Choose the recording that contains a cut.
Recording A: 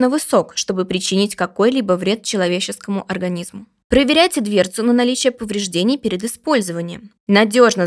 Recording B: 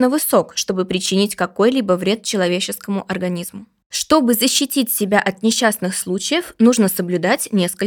A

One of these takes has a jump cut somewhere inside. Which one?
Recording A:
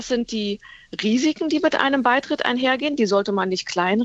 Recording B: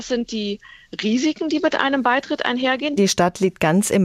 B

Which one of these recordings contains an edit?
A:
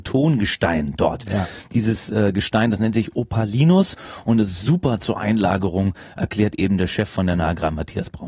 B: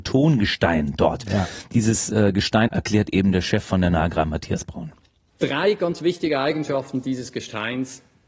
B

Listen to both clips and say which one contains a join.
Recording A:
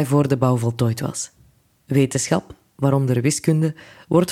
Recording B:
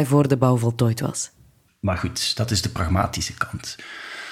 B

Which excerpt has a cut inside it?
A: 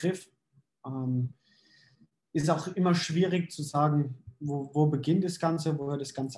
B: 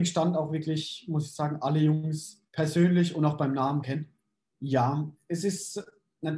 B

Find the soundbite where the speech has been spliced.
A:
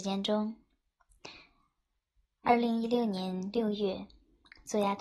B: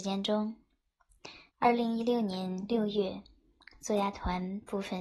B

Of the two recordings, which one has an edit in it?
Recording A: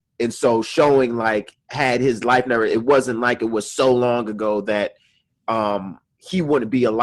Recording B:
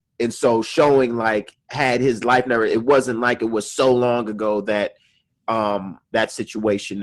B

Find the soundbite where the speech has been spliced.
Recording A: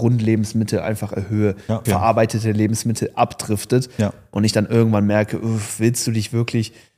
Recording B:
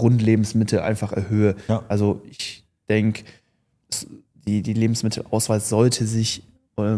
A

